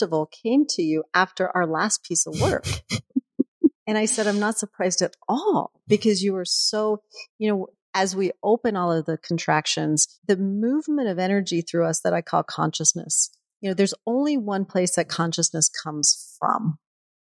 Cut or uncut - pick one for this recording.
cut